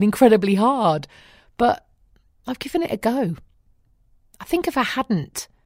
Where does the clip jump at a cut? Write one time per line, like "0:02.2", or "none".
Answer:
none